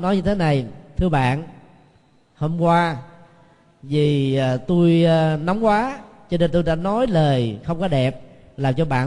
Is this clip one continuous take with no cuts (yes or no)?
yes